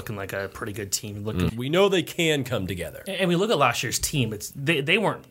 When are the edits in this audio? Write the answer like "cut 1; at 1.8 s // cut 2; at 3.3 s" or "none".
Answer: cut 1; at 1.5 s